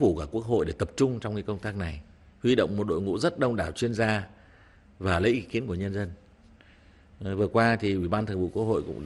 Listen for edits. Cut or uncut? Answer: uncut